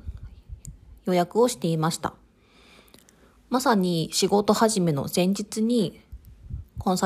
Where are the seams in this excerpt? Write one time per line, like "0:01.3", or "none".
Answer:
none